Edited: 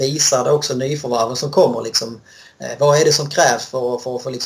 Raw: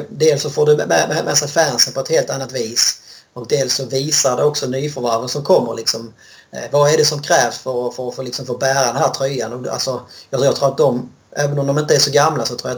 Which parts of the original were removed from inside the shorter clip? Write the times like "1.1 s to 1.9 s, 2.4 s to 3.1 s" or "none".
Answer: none